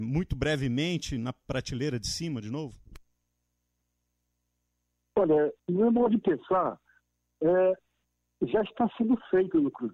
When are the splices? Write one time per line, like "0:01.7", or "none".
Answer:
0:05.6